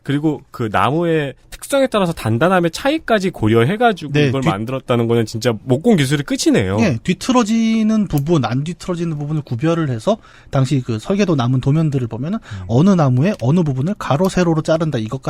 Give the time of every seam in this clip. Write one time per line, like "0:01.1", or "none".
none